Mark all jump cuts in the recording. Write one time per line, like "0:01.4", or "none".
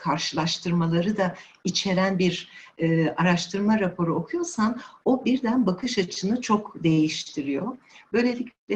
none